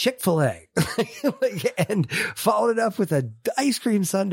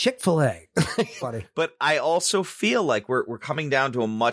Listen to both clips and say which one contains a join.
second; 1 cut; at 1.2 s

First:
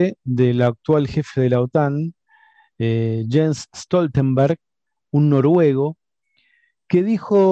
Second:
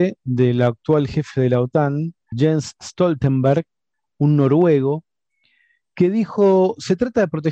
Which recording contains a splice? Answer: second; 1 cut; at 2.3 s

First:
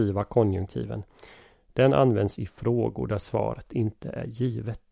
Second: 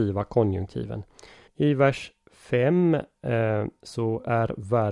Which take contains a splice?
second; 1 cut; at 1.5 s

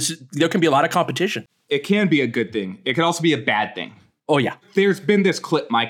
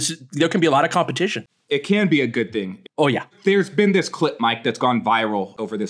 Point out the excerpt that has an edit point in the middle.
second; 1 cut; at 2.8 s

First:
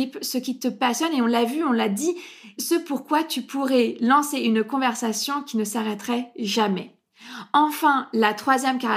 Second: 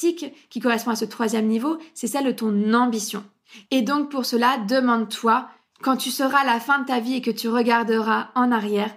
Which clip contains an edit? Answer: second; 1 cut; at 3.6 s

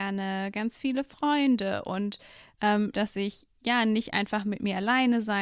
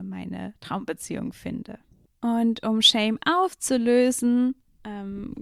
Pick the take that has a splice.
first; 1 cut; at 2.9 s

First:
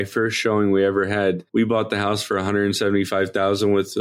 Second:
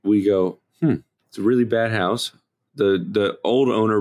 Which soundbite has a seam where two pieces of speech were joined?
first; 1 cut; at 1.5 s

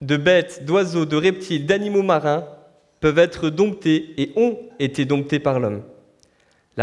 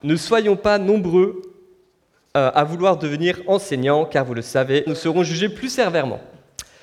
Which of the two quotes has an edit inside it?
second; 1 cut; at 4.9 s

